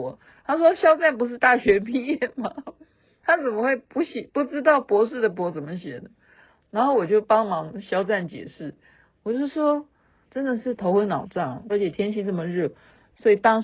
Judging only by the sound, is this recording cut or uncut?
cut